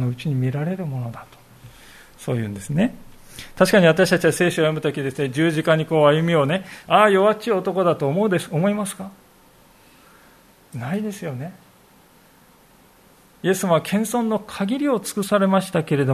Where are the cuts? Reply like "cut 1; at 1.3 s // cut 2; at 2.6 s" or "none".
cut 1; at 6.8 s